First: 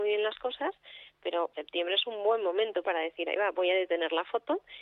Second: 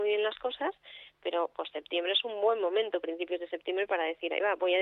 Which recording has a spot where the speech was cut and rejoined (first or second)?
first